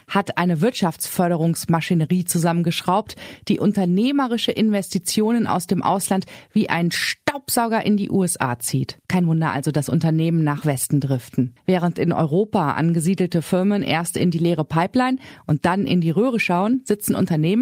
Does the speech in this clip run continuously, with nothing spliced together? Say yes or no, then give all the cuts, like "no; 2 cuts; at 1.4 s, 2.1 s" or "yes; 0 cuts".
no; 1 cut; at 11.6 s